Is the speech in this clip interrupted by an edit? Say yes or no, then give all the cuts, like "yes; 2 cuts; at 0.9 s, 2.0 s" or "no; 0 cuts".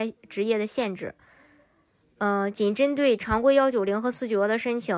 no; 0 cuts